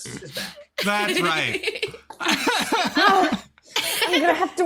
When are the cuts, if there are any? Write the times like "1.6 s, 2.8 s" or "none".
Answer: none